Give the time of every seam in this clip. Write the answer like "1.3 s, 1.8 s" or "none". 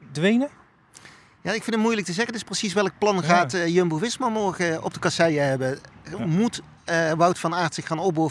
none